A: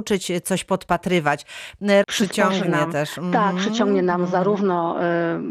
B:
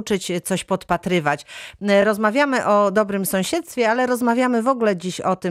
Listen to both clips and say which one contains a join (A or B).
A